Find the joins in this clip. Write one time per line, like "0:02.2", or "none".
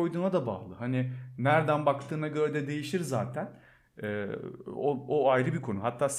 none